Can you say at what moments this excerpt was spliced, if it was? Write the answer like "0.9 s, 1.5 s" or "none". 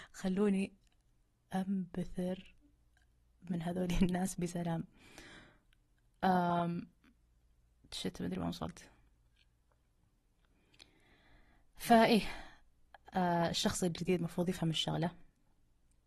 none